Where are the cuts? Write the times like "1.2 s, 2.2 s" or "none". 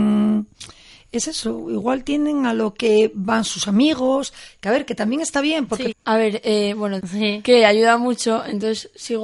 5.9 s, 7.0 s